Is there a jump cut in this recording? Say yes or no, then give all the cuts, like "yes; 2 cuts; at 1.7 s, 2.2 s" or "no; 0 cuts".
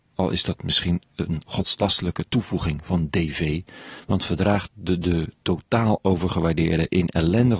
no; 0 cuts